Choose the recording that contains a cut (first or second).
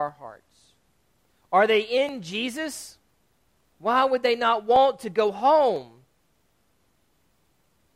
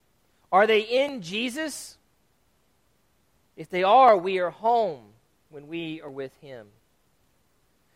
first